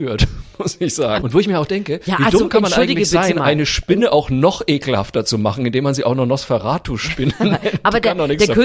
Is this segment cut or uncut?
cut